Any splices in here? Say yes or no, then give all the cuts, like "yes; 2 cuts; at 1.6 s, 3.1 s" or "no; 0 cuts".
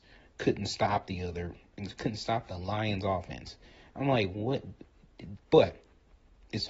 yes; 1 cut; at 5.4 s